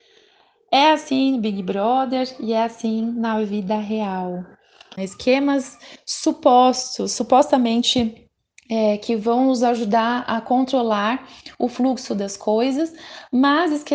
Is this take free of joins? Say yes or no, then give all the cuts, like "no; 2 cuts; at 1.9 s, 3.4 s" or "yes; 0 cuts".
no; 1 cut; at 5.0 s